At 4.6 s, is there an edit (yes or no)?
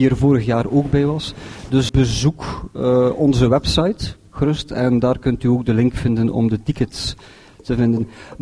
no